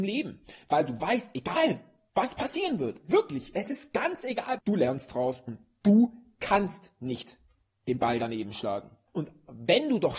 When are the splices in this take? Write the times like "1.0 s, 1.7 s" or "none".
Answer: 4.6 s, 9.1 s